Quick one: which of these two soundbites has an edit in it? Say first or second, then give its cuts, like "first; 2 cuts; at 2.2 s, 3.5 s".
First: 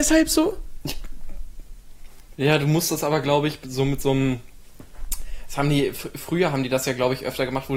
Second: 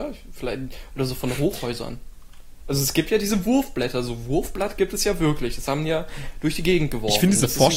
first; 1 cut; at 2.3 s